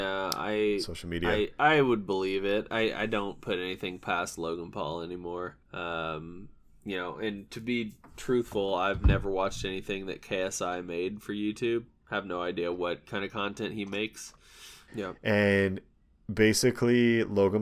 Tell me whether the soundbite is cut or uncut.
cut